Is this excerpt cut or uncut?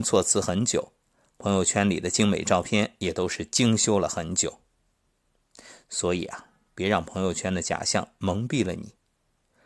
uncut